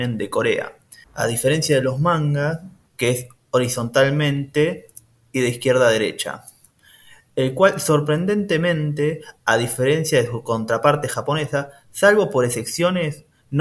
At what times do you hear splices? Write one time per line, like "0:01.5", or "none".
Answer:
0:01.0
0:02.9